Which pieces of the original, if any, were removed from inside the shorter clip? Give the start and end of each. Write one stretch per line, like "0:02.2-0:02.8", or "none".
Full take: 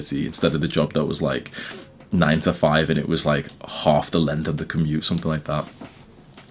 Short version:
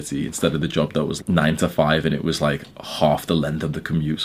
0:01.2-0:02.0

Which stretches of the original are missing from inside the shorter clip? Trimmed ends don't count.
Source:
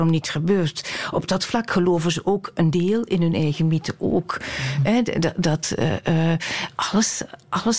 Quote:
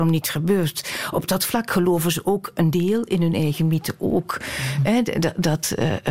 none

